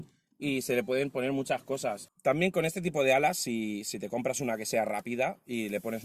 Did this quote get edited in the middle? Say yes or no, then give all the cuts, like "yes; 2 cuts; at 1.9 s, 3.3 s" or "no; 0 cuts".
yes; 1 cut; at 2.1 s